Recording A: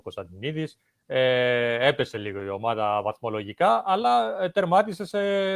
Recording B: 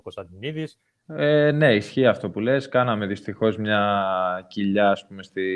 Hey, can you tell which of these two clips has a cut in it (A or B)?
B